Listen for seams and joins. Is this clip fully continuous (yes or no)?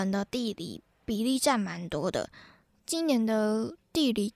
yes